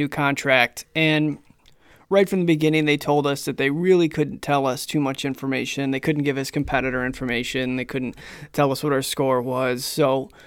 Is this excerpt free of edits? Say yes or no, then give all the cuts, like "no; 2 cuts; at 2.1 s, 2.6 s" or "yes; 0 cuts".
yes; 0 cuts